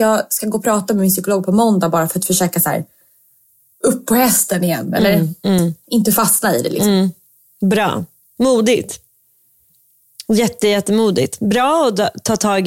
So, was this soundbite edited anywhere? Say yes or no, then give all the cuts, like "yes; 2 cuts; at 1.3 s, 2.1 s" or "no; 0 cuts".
no; 0 cuts